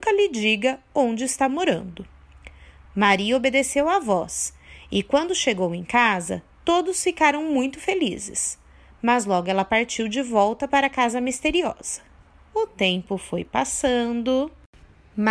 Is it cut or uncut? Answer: uncut